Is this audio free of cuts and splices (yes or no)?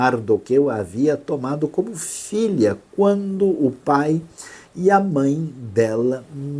yes